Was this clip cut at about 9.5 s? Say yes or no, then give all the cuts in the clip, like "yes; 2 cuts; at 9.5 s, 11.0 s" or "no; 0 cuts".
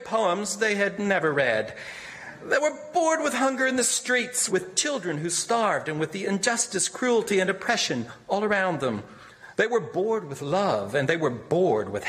yes; 2 cuts; at 4.5 s, 9.5 s